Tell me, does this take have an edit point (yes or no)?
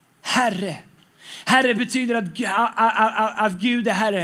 no